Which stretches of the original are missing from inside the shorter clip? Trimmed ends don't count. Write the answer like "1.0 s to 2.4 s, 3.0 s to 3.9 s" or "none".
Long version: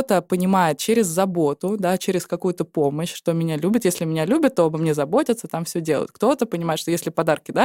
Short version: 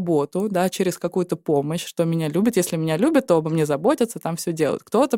none